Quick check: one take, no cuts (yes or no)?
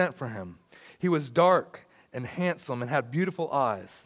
yes